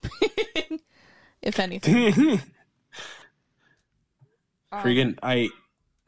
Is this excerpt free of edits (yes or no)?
yes